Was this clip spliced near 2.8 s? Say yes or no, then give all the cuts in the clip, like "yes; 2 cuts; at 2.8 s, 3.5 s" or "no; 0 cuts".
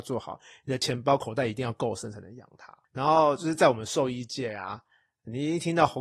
yes; 1 cut; at 2.8 s